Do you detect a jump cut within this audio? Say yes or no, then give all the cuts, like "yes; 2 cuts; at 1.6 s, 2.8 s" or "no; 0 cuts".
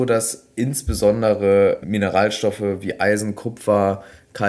yes; 1 cut; at 1.8 s